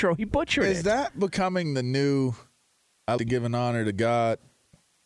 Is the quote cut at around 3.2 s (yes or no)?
yes